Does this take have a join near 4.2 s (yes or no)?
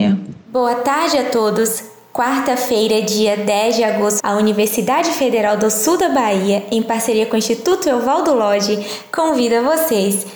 yes